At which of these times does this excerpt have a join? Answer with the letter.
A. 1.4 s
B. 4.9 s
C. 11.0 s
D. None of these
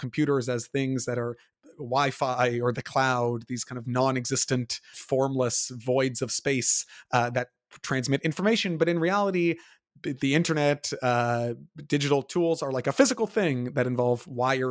B